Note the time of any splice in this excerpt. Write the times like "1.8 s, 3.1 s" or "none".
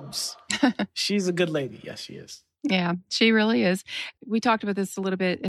4.2 s